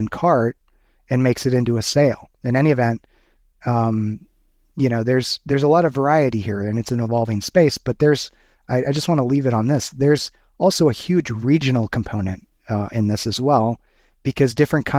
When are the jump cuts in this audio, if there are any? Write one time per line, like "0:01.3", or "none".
none